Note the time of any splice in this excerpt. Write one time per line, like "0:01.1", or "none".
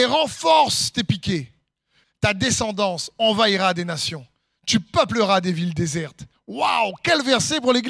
0:02.0